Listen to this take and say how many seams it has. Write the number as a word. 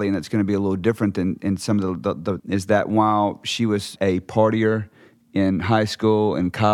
two